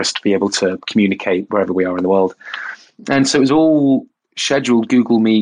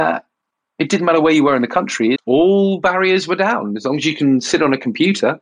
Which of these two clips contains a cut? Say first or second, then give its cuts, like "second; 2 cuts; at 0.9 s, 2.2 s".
second; 1 cut; at 2.2 s